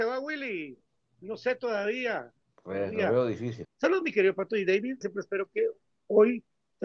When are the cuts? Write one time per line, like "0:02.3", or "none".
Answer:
0:03.6
0:05.0